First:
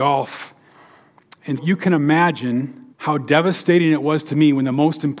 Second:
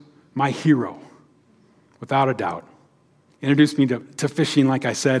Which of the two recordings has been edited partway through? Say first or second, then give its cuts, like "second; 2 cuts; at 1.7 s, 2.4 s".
first; 2 cuts; at 1.6 s, 2.9 s